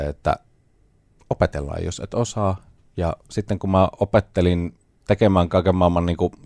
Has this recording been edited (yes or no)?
no